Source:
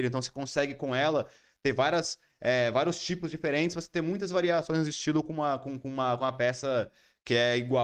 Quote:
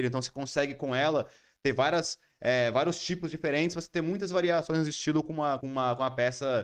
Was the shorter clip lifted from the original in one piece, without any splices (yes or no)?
no